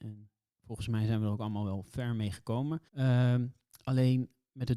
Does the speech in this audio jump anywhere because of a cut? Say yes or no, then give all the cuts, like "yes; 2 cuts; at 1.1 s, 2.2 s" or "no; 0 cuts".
yes; 1 cut; at 2.9 s